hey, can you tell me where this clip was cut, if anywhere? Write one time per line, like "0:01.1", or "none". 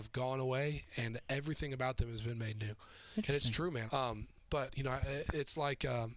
0:03.9